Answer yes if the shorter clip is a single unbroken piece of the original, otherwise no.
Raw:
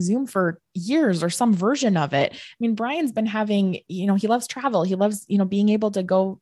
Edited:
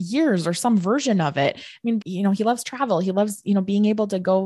no